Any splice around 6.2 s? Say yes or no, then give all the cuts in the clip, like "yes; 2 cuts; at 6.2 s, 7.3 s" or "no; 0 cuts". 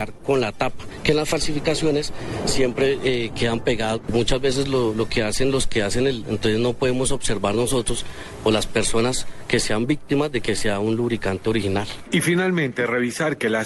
yes; 2 cuts; at 4.0 s, 6.2 s